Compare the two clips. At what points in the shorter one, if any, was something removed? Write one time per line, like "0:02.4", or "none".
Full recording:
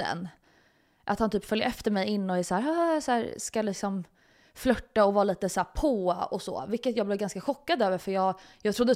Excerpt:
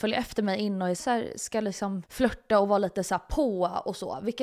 0:01.0
0:02.1